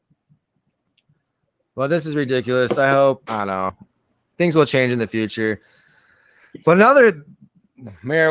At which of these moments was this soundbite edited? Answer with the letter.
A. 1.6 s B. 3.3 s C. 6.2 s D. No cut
B